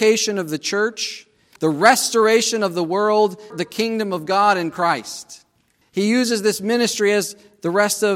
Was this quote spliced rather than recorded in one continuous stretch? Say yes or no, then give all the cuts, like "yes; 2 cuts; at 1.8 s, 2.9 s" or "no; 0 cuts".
yes; 3 cuts; at 1.6 s, 3.5 s, 5.8 s